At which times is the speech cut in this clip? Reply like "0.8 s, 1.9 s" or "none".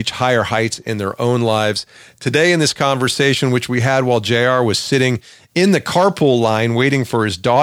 none